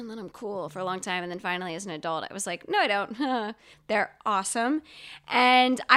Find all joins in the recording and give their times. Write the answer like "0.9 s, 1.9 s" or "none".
3.7 s

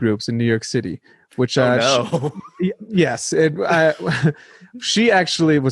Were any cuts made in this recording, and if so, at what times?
none

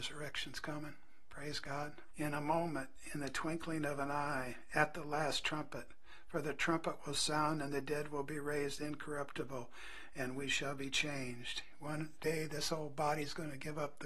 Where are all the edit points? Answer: 2.1 s

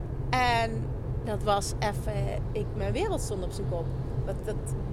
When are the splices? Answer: none

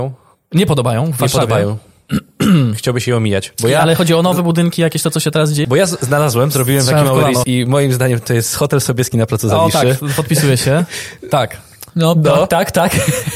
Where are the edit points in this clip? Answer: 5.6 s, 7.4 s

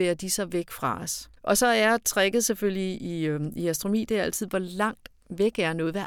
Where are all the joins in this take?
1.4 s

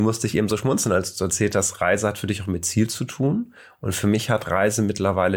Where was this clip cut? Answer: none

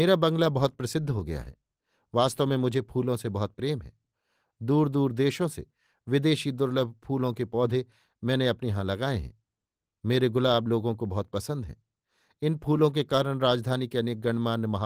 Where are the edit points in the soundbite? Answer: none

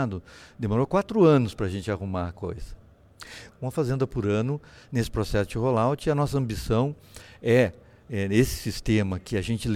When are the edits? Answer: 3.5 s

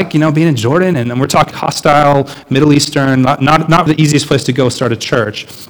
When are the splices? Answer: 1.5 s, 3.9 s

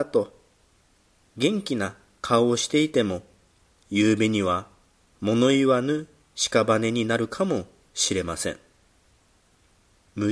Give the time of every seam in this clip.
none

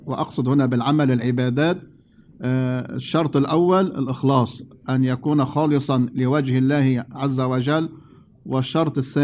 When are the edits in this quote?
none

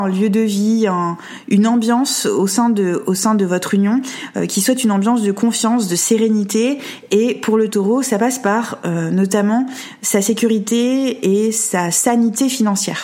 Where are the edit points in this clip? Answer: none

